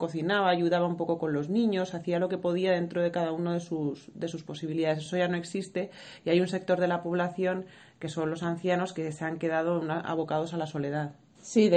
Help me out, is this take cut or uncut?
uncut